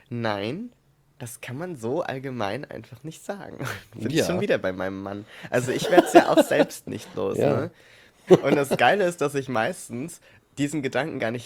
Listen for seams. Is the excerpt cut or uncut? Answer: cut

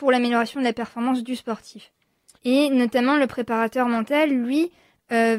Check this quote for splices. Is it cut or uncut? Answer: cut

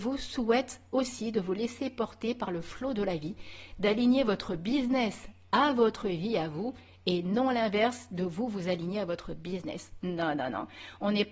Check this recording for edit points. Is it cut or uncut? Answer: uncut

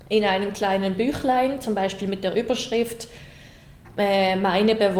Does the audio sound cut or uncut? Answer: uncut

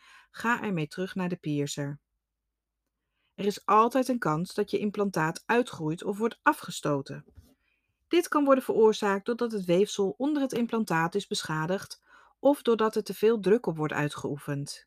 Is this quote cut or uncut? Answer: uncut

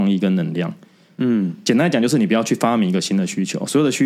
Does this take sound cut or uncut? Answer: uncut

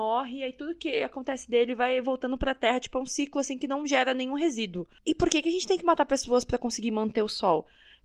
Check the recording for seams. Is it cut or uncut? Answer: uncut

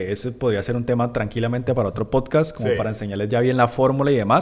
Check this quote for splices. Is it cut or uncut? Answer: uncut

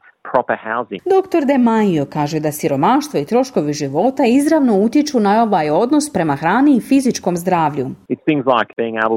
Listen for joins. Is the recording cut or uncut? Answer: cut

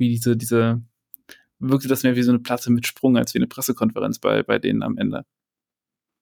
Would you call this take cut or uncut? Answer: uncut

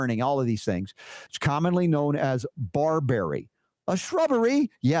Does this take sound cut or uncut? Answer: cut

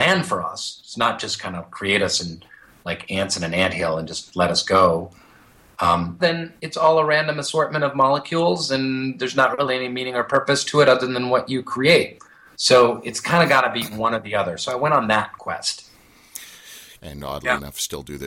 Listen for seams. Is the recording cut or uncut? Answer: cut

